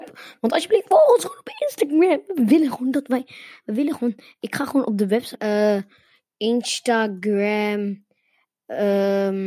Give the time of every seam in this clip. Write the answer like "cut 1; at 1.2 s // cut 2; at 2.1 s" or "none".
cut 1; at 5.3 s